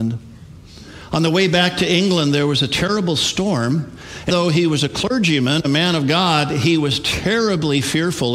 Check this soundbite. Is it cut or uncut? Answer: cut